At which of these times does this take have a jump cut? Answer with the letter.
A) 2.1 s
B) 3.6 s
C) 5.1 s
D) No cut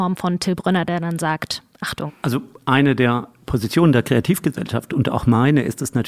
A